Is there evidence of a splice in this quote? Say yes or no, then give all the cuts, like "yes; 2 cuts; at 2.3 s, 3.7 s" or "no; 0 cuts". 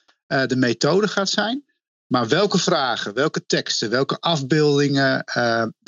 no; 0 cuts